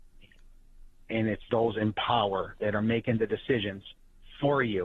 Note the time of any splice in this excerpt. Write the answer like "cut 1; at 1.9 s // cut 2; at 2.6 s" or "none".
cut 1; at 1.5 s